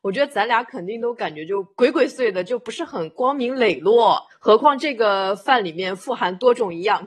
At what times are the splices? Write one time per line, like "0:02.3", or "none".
0:02.1
0:04.3